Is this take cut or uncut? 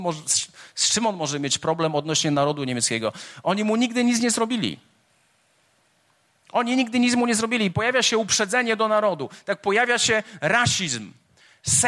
uncut